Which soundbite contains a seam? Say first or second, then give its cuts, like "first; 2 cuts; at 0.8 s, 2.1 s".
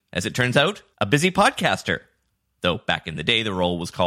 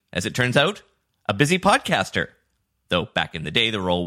first; 1 cut; at 0.9 s